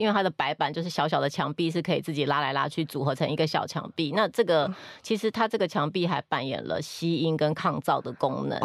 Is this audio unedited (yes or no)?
yes